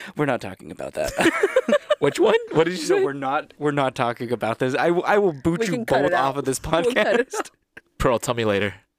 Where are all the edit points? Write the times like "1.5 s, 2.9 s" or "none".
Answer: none